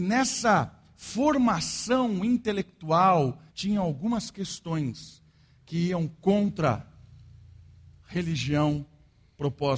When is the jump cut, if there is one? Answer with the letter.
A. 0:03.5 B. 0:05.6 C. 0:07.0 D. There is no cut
A